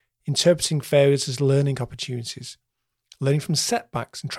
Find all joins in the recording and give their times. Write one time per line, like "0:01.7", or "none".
none

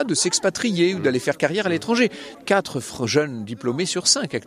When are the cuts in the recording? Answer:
0:02.3

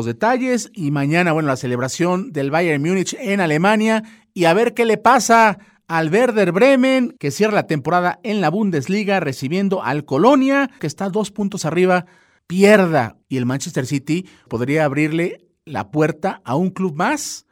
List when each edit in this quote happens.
0:10.8
0:13.2
0:14.5

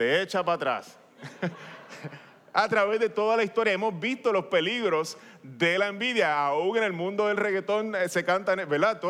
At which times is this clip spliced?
none

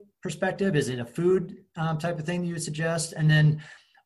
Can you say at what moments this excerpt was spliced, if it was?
none

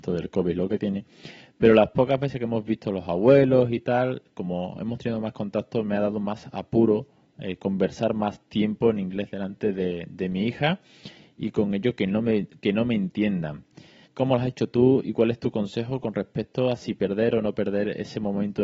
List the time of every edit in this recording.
0:14.1

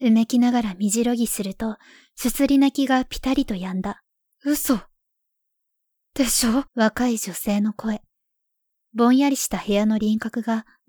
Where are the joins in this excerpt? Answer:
0:04.3
0:06.7

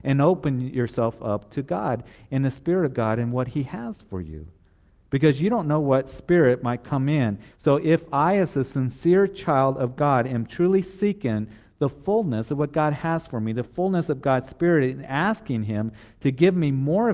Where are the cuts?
0:07.5

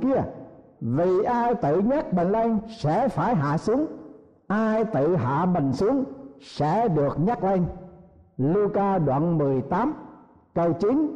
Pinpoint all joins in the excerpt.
none

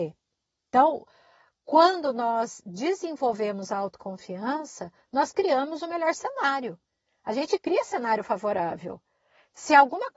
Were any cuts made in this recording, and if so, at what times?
none

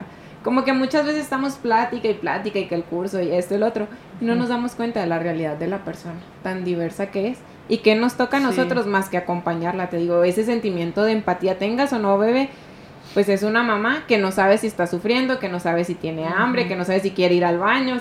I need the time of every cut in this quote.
none

